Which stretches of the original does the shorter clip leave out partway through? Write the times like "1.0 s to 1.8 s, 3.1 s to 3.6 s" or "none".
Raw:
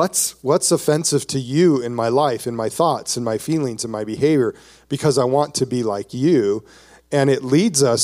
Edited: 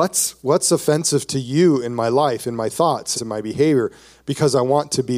3.1 s to 3.8 s

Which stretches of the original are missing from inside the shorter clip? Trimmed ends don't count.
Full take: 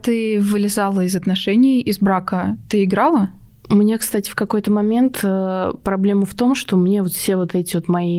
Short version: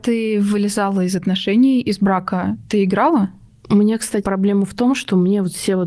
4.2 s to 5.8 s

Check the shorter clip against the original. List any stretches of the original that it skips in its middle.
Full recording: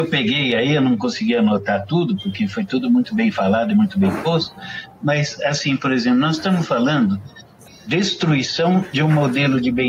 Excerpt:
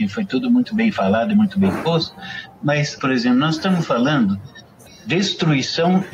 5.4 s to 5.8 s

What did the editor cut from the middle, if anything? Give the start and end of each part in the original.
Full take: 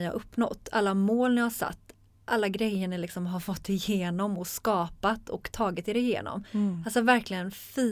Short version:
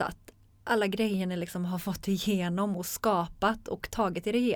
none

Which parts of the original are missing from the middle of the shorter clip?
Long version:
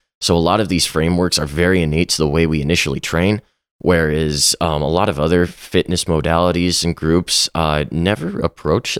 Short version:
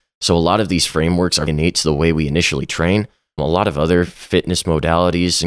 1.5 s to 1.8 s, 3.7 s to 4.8 s

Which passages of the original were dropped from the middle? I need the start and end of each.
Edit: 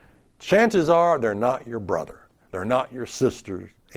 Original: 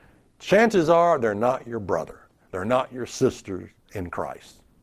none

